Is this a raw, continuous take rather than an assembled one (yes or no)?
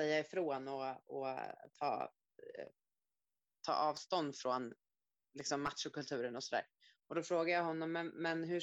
yes